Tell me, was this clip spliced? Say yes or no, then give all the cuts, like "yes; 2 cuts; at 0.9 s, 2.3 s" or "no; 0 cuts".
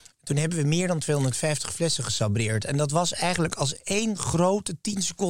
no; 0 cuts